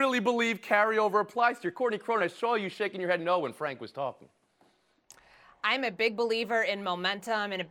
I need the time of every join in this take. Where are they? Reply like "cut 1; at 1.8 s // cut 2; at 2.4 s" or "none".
none